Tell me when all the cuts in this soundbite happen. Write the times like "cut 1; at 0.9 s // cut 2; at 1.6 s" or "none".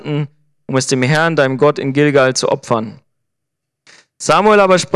none